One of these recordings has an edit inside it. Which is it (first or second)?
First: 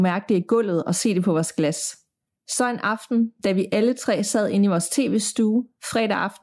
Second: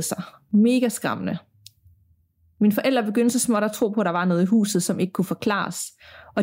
first